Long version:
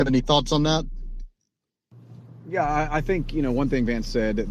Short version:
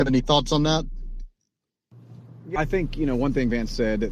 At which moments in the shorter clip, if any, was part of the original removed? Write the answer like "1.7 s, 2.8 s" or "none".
2.6 s